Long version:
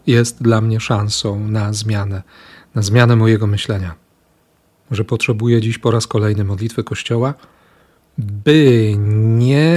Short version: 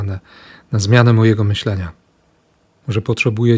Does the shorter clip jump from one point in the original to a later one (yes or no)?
no